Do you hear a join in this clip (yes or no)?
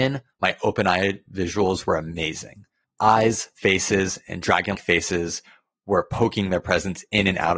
yes